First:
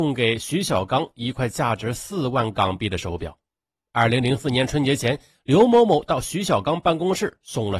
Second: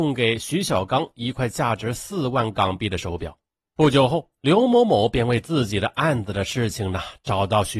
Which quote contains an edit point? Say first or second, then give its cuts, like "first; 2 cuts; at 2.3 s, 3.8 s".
second; 1 cut; at 3.6 s